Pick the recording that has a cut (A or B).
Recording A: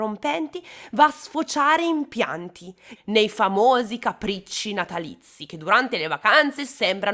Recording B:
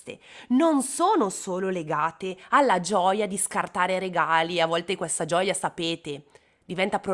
A